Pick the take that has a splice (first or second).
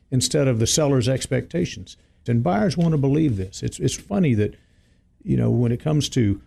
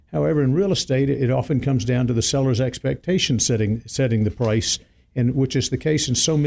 first